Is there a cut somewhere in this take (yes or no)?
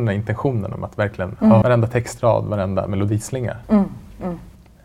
yes